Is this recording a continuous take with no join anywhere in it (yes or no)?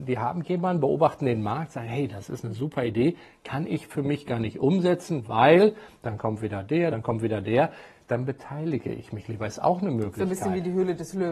no